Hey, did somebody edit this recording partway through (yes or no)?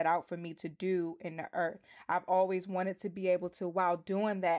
no